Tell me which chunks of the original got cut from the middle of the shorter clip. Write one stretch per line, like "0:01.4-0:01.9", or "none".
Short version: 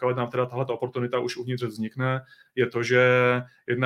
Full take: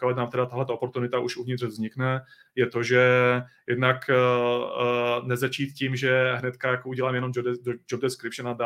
none